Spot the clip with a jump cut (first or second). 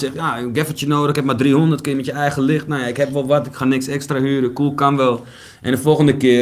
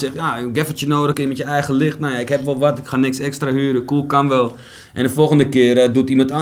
second